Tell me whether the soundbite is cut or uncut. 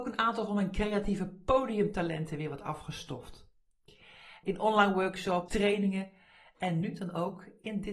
cut